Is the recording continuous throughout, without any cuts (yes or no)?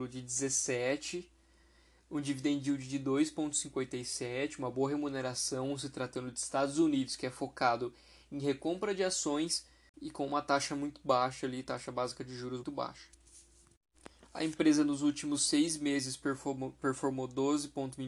no